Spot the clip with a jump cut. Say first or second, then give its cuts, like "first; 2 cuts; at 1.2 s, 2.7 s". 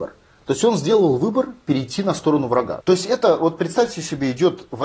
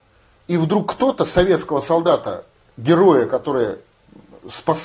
first; 1 cut; at 2.8 s